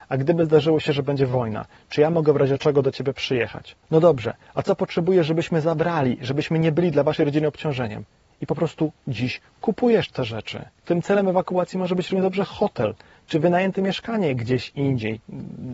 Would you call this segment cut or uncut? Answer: uncut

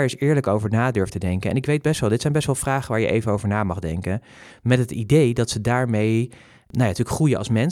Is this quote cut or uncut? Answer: cut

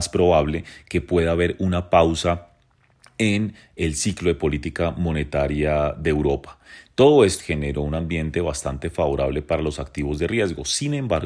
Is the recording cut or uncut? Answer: cut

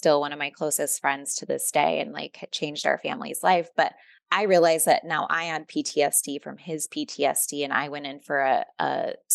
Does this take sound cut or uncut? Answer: uncut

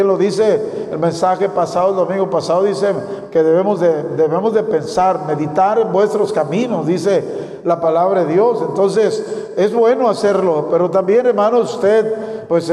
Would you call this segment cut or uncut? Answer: uncut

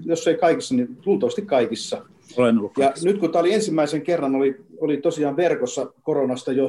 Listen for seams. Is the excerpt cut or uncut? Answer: uncut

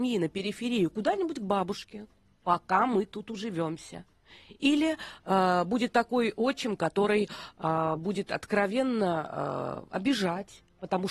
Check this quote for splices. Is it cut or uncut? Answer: uncut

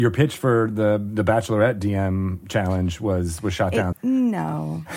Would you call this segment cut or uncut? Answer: cut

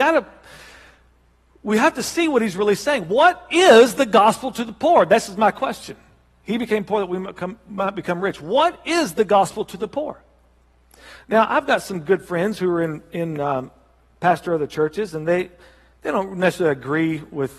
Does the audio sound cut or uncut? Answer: uncut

